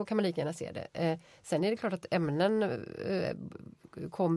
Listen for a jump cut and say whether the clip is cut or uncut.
uncut